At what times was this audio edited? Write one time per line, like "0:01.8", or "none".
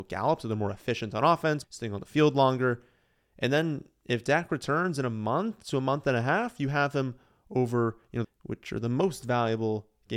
0:01.6
0:08.2